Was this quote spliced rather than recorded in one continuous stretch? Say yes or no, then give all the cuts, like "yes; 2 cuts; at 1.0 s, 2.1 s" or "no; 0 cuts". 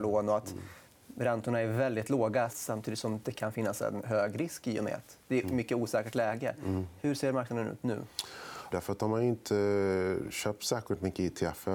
yes; 2 cuts; at 2.5 s, 8.7 s